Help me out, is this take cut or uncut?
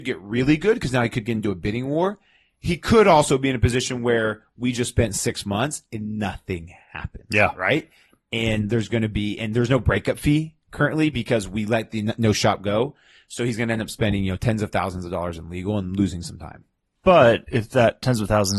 uncut